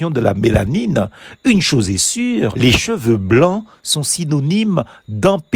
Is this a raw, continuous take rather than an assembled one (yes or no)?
no